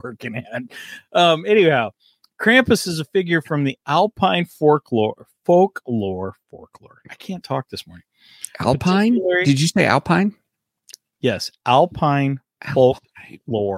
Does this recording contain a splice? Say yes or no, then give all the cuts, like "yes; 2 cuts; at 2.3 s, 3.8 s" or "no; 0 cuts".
no; 0 cuts